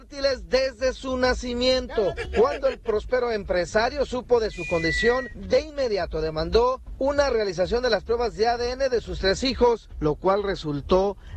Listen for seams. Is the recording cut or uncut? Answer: uncut